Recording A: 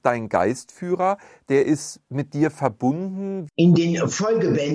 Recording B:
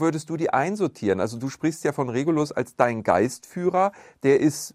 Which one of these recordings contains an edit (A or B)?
A